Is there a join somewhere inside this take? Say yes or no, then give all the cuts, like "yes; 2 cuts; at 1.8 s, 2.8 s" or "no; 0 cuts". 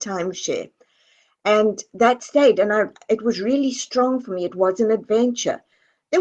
no; 0 cuts